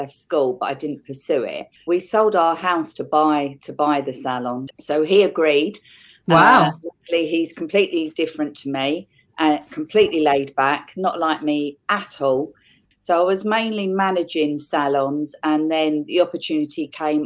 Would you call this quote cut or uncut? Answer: cut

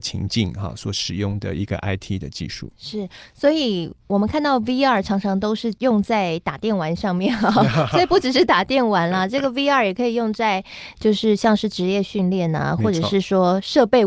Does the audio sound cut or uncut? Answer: uncut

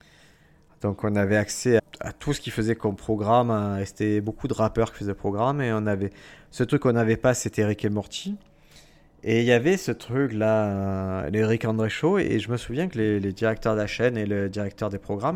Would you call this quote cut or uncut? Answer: cut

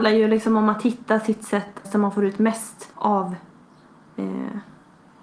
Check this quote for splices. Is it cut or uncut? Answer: cut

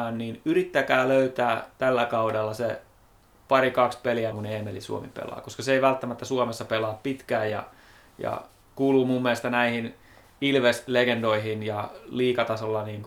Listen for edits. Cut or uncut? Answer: cut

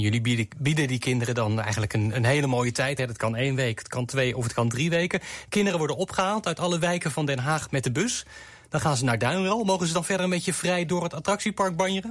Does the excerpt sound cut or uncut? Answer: uncut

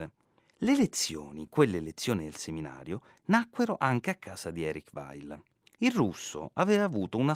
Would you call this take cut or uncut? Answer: uncut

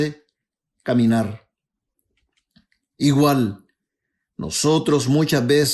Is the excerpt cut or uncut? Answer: uncut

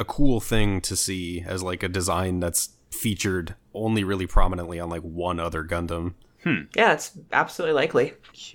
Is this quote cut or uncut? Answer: uncut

